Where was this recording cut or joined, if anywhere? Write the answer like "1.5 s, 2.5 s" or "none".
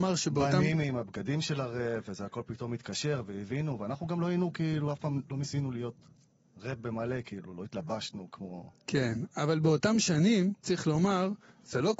10.6 s